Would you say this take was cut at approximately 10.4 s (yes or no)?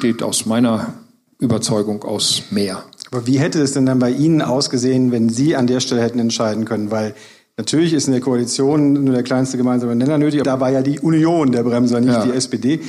yes